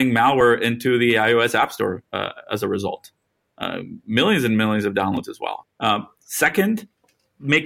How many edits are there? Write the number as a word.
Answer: one